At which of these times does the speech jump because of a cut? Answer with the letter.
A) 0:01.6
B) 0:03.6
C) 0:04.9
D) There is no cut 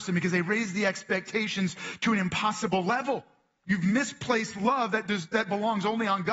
B